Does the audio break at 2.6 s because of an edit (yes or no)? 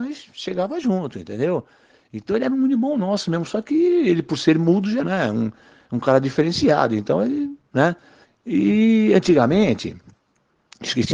no